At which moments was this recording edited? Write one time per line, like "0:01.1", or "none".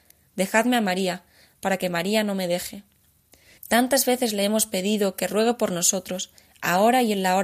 0:03.6

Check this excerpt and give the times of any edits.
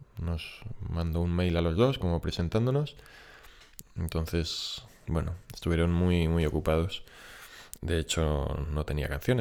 0:03.8
0:07.8

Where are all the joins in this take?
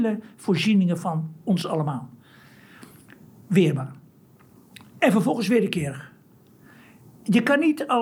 none

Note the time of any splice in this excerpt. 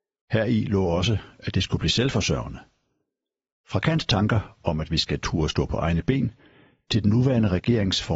none

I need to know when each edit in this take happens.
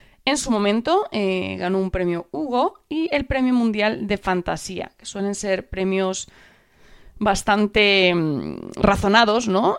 none

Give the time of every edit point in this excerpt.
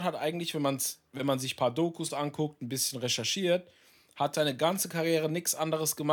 0:04.3

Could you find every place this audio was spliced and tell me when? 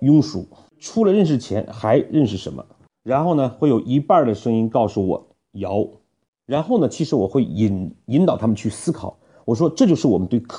none

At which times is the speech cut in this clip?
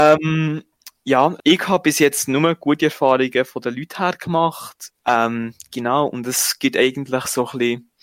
0:01.4
0:04.9

